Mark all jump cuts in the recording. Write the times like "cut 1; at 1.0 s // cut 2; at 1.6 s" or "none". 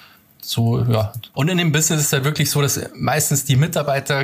cut 1; at 1.3 s